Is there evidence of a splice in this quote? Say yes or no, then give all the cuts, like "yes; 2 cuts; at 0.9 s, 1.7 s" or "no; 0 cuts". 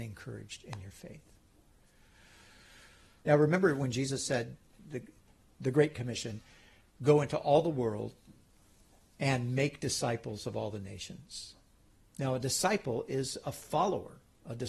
yes; 1 cut; at 3.2 s